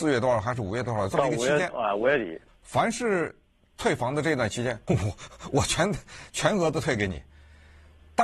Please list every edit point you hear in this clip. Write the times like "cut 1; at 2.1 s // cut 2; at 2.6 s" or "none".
cut 1; at 2.5 s // cut 2; at 4.9 s